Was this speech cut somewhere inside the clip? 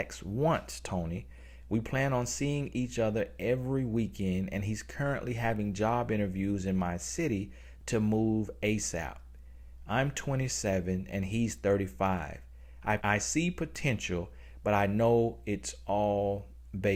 yes; 1 cut; at 13.0 s

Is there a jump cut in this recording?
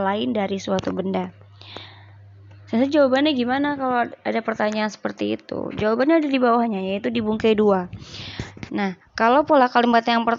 yes; 1 cut; at 8.7 s

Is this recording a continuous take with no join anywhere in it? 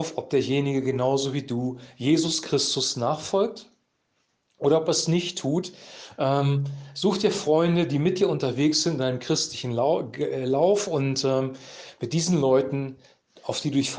yes; 0 cuts

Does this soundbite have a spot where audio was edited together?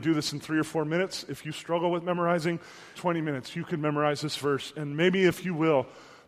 yes; 1 cut; at 2.9 s

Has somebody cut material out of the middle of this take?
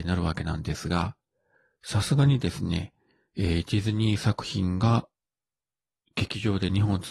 no; 0 cuts

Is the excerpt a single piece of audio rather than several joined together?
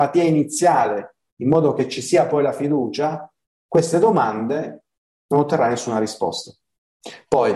yes; 0 cuts

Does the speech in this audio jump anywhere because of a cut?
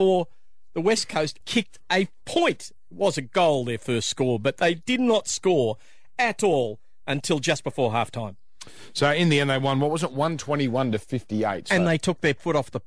yes; 1 cut; at 1.4 s

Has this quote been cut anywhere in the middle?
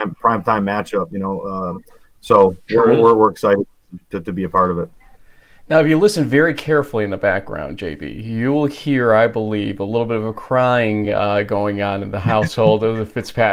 no; 0 cuts

